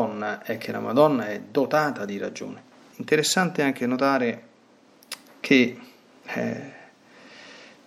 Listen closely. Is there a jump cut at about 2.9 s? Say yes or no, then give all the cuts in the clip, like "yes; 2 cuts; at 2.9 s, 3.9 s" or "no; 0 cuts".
yes; 1 cut; at 2.9 s